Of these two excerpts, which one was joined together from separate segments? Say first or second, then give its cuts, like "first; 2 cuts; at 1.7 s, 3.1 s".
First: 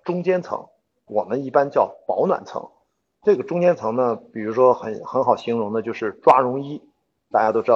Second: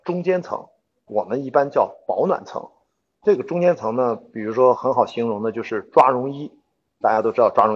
second; 1 cut; at 4.7 s